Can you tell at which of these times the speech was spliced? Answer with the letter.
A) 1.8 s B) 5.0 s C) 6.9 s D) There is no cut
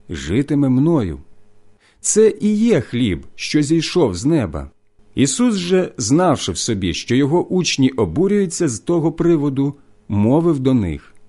B